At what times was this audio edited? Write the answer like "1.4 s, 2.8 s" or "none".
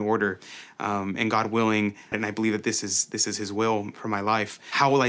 2.1 s